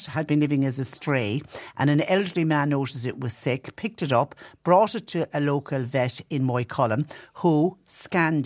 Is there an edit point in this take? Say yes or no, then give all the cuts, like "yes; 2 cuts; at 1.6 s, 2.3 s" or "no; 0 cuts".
no; 0 cuts